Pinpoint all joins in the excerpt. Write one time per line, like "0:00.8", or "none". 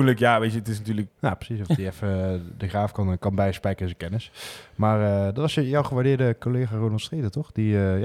0:01.1